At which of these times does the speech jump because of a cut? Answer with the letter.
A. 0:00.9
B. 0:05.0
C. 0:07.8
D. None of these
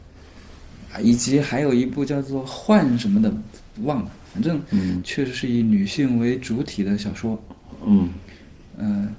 B